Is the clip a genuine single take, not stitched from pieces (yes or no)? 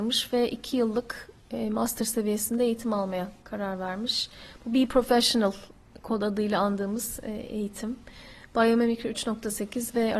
yes